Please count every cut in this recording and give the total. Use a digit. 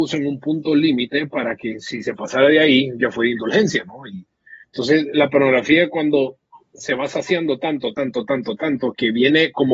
2